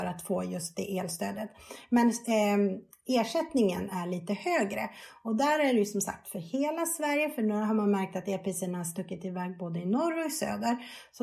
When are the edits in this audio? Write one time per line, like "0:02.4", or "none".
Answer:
none